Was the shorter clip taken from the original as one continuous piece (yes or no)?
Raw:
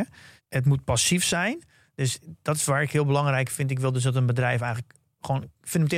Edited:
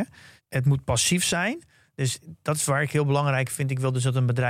yes